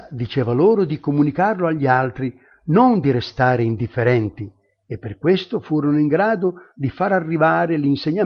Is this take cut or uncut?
uncut